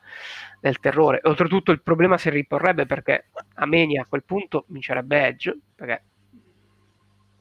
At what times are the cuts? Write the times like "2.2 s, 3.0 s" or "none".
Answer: none